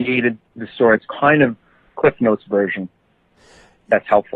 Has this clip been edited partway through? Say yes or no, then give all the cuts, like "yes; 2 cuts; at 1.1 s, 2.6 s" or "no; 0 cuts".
no; 0 cuts